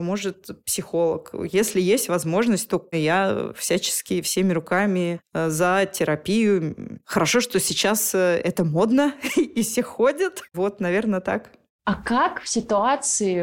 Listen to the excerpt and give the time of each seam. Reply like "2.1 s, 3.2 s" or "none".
2.9 s, 10.5 s